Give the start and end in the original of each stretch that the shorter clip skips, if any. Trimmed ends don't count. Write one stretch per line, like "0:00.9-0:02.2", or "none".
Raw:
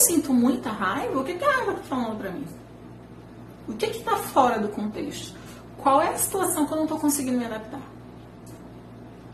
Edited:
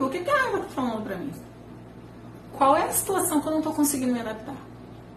0:03.7-0:05.8